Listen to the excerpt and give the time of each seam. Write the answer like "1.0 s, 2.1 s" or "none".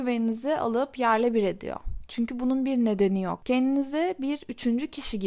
2.1 s